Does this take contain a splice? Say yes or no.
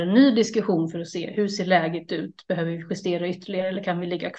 no